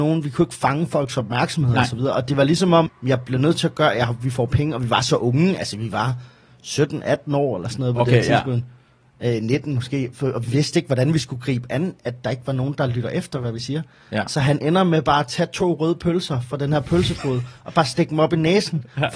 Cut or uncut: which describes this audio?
cut